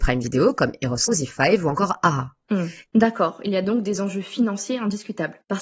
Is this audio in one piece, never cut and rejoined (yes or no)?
no